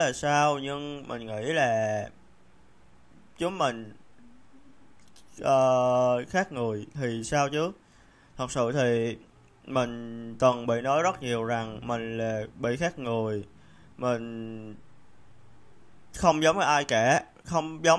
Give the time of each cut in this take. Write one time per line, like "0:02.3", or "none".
none